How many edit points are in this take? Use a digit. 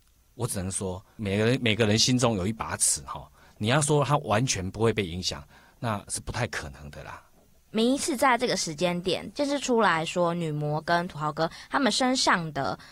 1